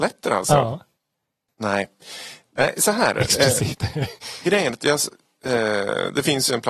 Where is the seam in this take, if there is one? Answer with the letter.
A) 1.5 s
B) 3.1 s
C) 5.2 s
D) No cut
A